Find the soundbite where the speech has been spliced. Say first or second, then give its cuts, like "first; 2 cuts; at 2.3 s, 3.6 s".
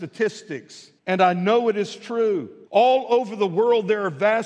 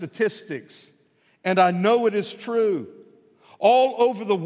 first; 2 cuts; at 1.0 s, 2.7 s